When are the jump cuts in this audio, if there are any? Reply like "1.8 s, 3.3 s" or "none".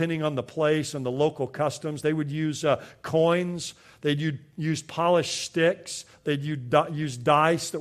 6.1 s